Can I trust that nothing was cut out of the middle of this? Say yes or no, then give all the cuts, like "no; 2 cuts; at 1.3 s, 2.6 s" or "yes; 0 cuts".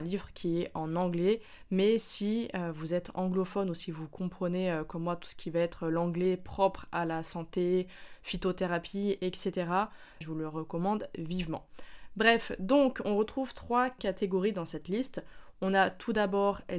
no; 1 cut; at 10.2 s